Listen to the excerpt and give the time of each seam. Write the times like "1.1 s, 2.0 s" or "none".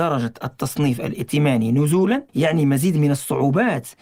2.3 s